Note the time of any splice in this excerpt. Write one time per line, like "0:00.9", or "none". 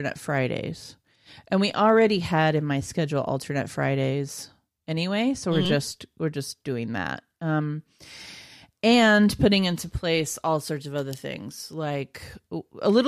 none